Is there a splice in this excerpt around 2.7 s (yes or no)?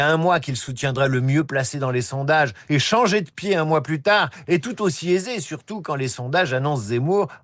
yes